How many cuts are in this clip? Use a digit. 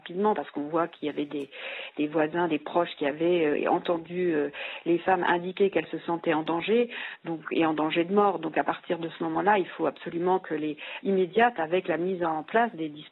1